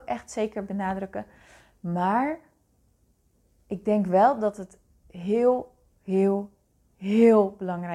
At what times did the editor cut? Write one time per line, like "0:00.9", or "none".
none